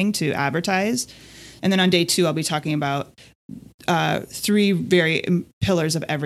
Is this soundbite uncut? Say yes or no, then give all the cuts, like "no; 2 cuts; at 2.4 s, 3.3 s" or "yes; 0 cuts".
no; 1 cut; at 1.6 s